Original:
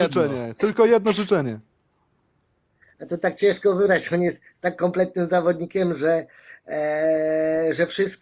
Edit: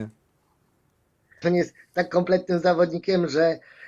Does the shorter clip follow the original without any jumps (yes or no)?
no